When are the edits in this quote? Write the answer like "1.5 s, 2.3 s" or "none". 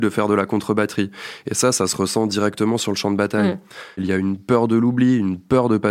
4.0 s